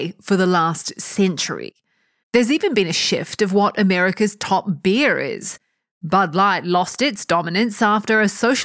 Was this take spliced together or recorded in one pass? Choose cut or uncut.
cut